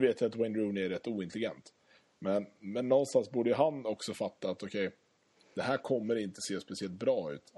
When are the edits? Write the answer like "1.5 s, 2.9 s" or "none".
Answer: none